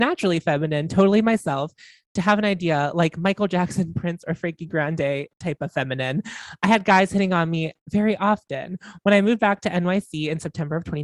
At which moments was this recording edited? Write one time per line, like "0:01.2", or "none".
none